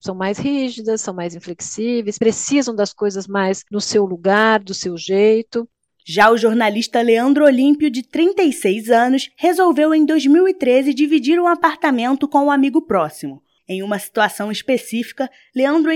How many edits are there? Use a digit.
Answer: 1